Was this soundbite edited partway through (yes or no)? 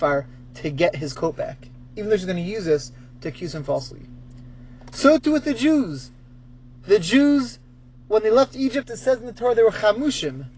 no